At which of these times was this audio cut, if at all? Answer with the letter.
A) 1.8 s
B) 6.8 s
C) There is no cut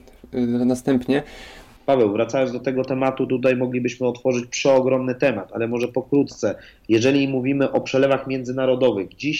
A